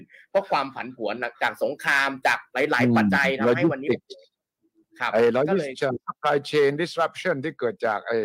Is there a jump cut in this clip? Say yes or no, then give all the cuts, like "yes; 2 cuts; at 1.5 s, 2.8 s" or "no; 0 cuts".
yes; 1 cut; at 3.1 s